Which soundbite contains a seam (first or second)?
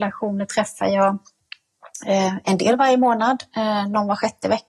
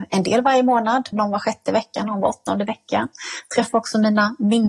second